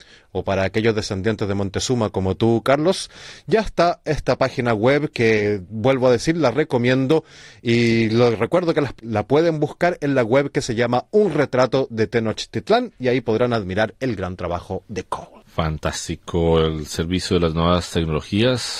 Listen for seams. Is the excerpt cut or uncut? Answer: uncut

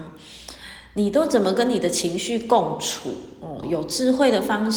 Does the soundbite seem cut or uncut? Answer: cut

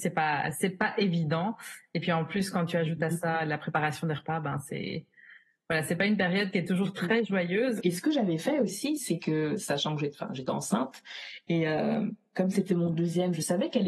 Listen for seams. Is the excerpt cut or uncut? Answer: cut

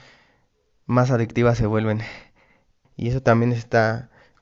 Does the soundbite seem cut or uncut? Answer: cut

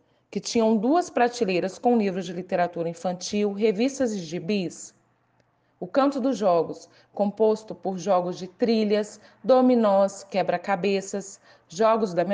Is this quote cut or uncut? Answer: uncut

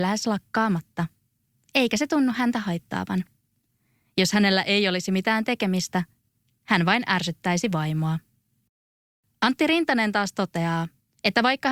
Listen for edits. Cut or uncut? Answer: uncut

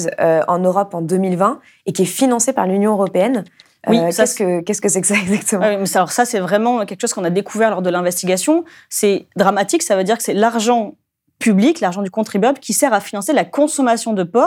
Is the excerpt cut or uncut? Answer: uncut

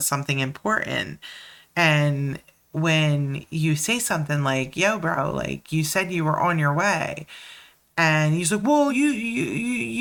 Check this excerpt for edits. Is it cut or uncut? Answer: cut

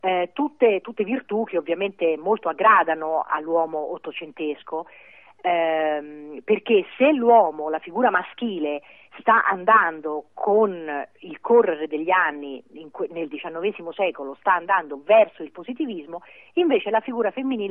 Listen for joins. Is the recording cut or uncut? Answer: uncut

